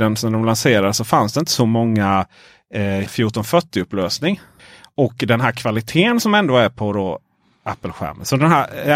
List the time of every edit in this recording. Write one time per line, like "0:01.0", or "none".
0:03.1